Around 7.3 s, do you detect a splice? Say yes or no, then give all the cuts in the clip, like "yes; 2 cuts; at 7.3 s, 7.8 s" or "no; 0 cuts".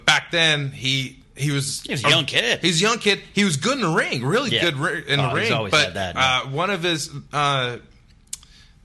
yes; 1 cut; at 7.3 s